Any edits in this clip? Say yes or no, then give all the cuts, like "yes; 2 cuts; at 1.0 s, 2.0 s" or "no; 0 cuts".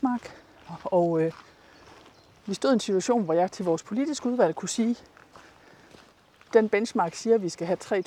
no; 0 cuts